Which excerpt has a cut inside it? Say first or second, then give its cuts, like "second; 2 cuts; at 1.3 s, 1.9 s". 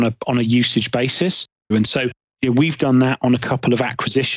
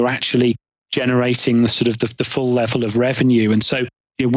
first; 1 cut; at 1.7 s